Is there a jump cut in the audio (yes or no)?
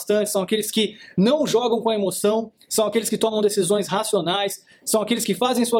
no